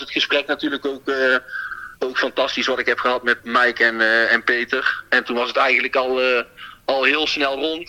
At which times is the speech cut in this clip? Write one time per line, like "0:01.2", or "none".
0:02.0
0:03.4